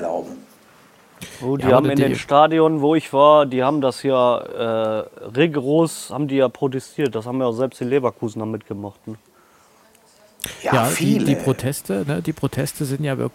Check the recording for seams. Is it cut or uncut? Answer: uncut